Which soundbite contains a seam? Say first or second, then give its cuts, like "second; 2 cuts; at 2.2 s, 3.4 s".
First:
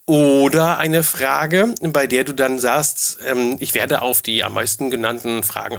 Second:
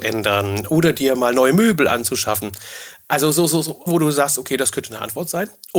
second; 1 cut; at 3.9 s